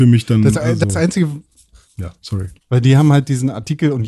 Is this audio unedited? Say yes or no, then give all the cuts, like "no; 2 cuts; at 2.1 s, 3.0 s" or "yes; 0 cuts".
no; 1 cut; at 2.6 s